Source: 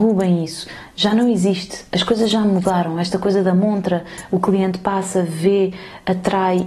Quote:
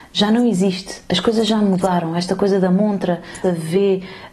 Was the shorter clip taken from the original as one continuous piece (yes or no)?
no